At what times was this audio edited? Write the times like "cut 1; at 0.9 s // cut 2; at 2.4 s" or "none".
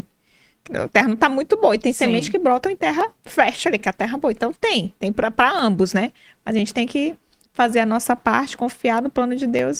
cut 1; at 3.1 s